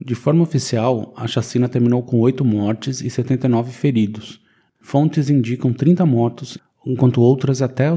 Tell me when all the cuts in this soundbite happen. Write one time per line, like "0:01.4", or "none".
0:04.7